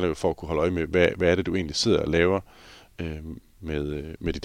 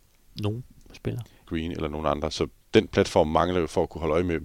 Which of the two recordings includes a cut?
second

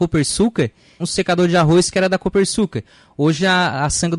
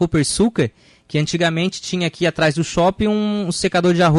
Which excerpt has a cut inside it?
first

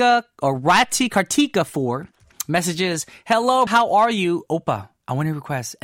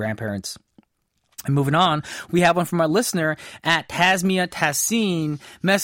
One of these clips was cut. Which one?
first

